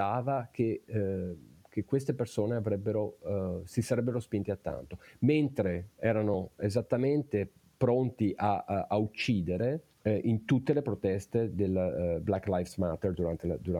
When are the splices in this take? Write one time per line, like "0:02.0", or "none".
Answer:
0:09.9